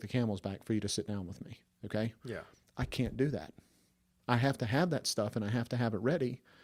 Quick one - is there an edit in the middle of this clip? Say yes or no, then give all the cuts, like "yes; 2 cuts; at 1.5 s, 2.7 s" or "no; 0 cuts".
no; 0 cuts